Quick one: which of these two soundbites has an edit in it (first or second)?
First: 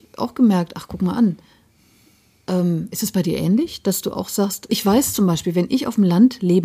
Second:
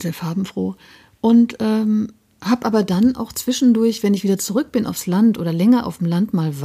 first